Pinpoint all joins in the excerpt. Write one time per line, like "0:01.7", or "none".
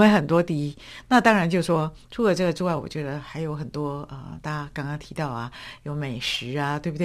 none